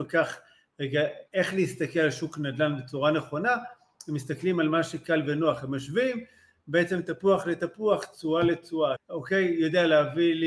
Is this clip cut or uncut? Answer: cut